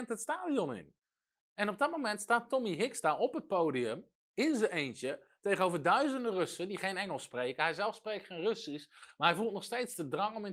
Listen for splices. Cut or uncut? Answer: uncut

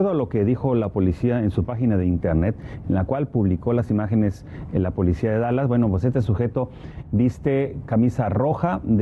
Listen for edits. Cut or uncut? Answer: cut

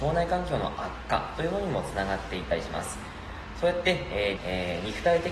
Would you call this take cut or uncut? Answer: cut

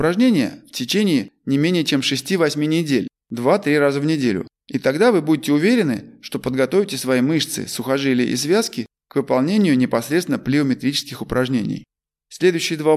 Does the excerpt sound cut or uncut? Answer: uncut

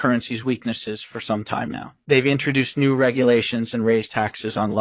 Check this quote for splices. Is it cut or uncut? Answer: uncut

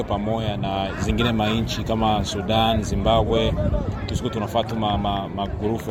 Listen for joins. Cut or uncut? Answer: uncut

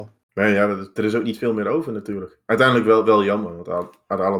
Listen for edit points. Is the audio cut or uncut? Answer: uncut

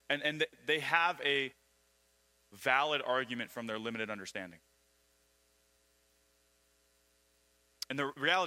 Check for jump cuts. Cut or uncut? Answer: uncut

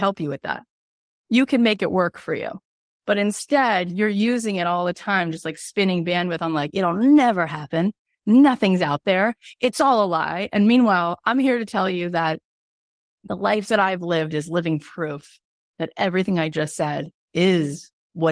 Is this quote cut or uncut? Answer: uncut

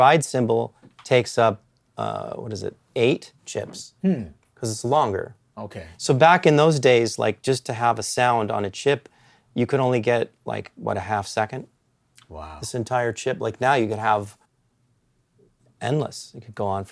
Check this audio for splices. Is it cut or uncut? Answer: cut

